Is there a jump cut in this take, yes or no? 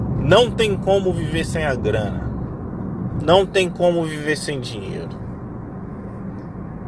no